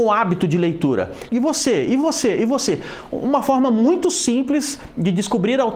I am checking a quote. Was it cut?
yes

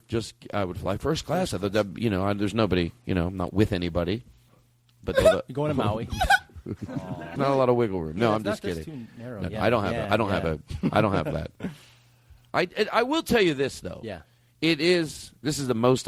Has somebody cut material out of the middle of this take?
yes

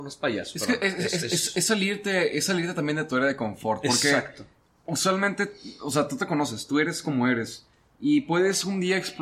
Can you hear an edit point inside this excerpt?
no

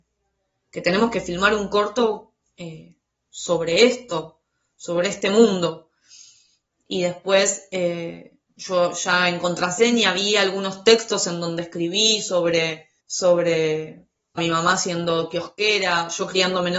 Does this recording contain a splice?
yes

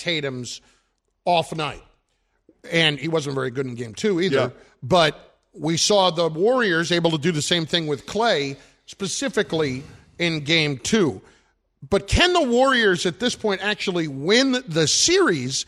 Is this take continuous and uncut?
yes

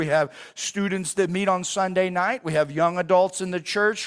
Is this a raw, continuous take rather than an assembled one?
yes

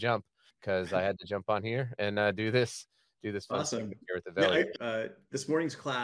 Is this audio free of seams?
no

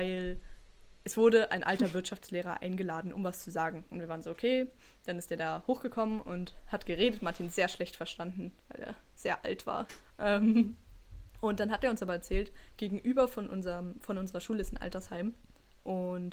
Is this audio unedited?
no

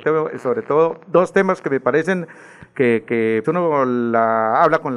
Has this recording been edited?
yes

